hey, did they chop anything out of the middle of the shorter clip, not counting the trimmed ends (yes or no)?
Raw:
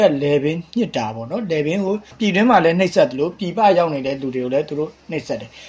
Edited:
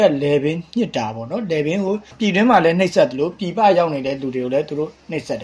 no